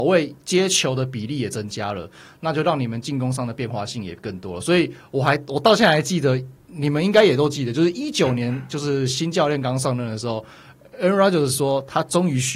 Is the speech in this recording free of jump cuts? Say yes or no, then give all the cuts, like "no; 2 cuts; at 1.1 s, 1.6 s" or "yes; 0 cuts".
yes; 0 cuts